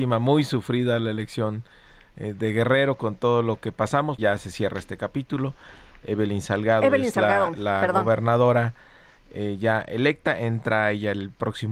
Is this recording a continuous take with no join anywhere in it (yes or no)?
no